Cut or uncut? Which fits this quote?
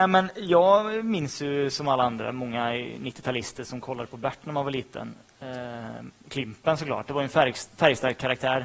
uncut